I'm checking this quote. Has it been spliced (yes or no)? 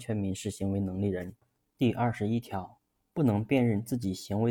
yes